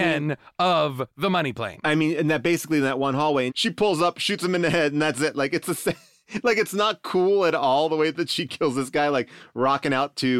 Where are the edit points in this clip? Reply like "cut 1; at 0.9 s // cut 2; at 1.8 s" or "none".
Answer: cut 1; at 3.5 s